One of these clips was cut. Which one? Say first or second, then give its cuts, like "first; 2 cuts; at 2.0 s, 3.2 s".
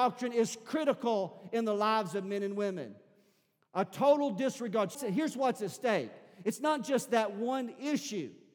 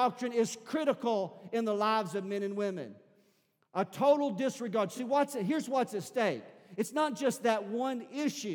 first; 1 cut; at 4.9 s